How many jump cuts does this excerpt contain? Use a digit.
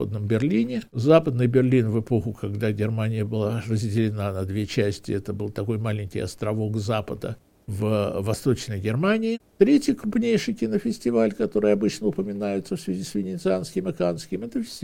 1